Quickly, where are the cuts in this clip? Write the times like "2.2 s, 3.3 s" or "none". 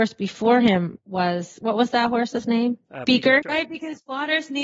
3.4 s